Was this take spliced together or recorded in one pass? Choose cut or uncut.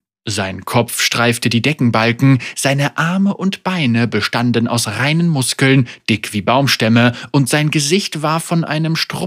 uncut